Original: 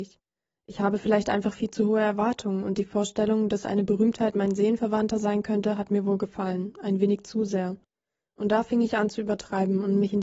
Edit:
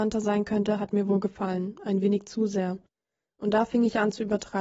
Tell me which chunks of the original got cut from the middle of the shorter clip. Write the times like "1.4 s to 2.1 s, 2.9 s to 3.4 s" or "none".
none